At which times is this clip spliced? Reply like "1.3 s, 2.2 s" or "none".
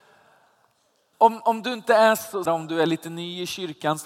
1.1 s, 2.5 s